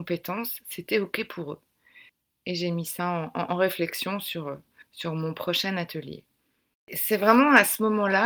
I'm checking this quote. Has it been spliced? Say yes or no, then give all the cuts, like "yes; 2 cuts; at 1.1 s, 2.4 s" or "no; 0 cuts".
yes; 1 cut; at 6.7 s